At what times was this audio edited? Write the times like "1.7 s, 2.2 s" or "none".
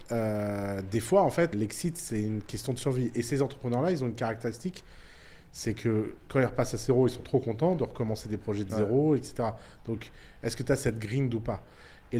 1.5 s

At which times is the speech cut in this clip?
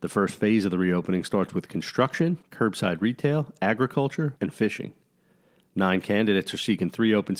2.4 s, 4.4 s

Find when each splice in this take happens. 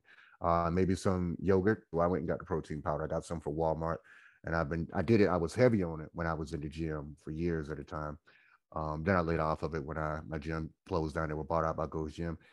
1.9 s

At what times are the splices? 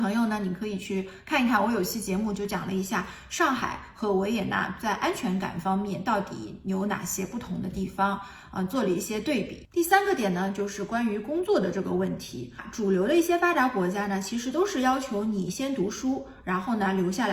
none

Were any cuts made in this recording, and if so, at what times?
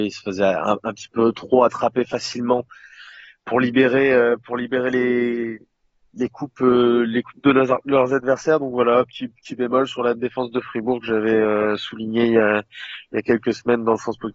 none

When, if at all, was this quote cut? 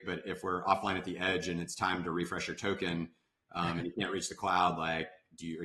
none

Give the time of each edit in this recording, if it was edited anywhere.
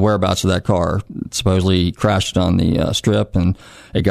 none

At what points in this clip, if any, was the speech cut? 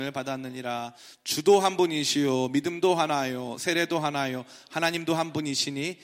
none

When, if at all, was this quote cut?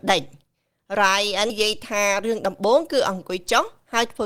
1.5 s

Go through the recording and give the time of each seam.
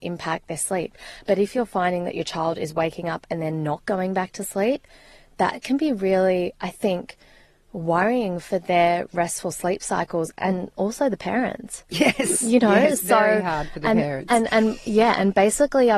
none

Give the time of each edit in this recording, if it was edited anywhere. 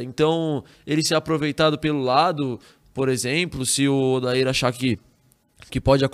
none

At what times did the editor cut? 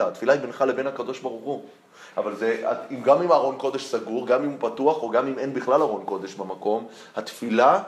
2.1 s

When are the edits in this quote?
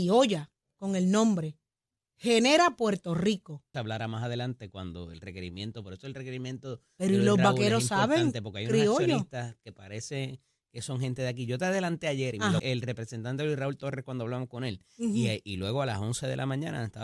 3.7 s, 12.6 s

